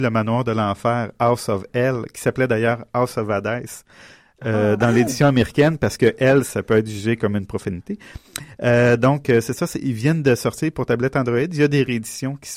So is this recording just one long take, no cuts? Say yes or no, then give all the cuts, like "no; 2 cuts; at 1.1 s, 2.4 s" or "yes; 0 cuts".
yes; 0 cuts